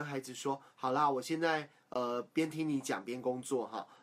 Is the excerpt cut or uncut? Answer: uncut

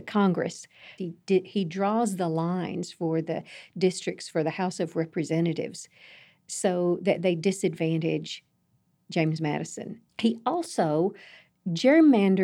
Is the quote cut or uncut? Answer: cut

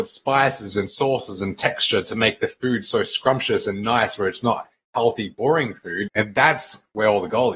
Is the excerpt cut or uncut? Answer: cut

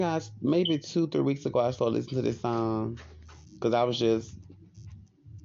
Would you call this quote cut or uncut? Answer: cut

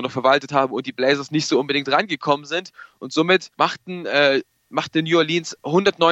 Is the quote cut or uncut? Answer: cut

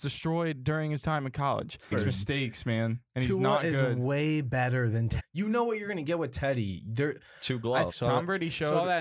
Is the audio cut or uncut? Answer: cut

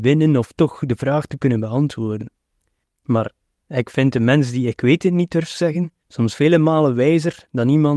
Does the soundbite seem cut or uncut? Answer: cut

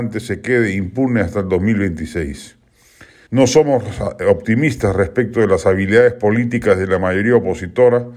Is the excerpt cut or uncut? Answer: cut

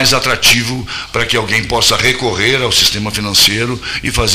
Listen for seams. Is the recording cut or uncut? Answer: uncut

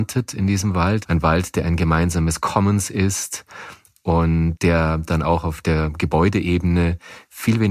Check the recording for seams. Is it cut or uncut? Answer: cut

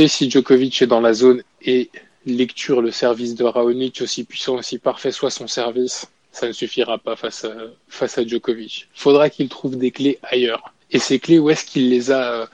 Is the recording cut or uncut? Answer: uncut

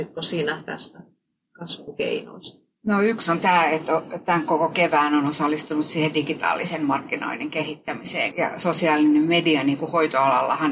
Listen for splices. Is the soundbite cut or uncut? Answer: cut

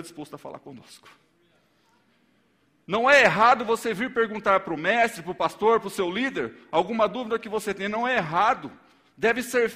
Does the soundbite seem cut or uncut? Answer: uncut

